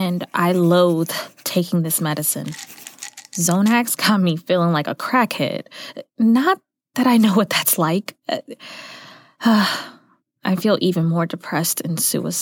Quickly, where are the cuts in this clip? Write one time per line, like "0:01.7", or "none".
0:06.1